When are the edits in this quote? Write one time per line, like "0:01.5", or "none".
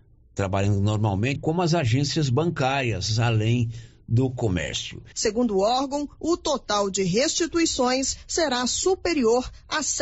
0:01.4
0:05.1